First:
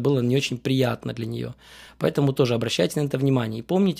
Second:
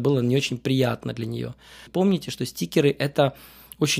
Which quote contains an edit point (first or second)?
second